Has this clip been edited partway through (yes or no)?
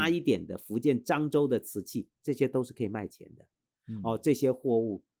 no